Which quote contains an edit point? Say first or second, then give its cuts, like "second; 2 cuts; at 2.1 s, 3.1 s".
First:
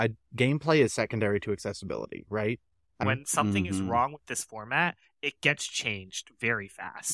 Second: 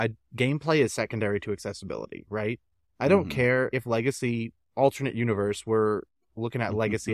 first; 1 cut; at 3.0 s